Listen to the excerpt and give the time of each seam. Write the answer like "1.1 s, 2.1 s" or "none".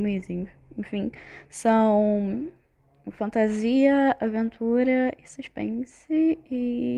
none